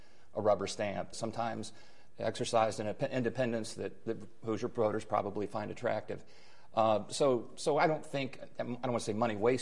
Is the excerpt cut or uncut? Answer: cut